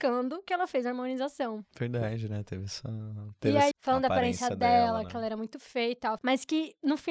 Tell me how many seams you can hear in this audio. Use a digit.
2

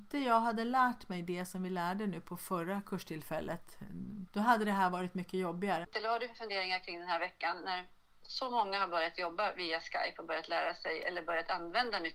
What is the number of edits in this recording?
2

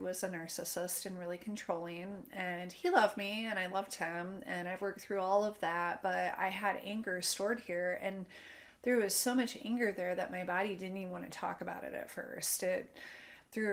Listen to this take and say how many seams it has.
0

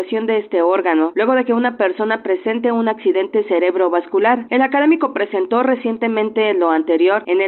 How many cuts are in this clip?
1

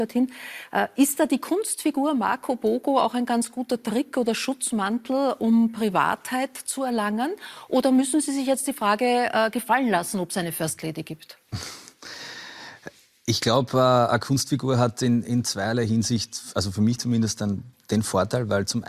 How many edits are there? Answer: 0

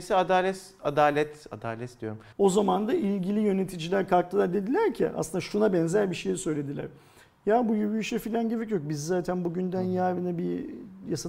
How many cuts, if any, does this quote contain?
1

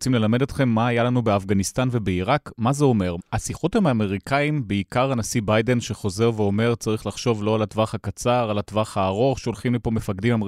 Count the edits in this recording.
1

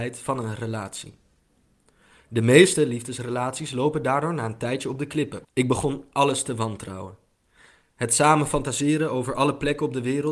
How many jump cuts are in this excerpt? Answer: 1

